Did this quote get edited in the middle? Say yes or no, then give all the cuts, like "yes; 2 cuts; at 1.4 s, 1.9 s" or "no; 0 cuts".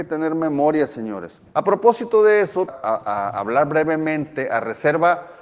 yes; 2 cuts; at 1.5 s, 2.7 s